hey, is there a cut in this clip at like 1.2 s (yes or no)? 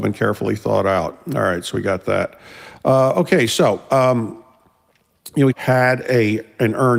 no